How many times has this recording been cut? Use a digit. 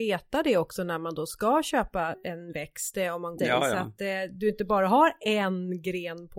1